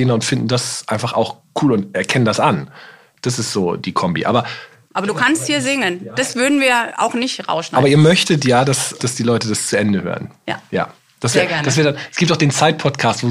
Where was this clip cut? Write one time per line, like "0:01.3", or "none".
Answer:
0:09.0